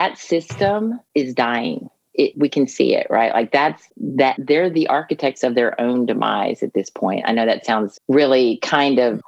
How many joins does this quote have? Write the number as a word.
one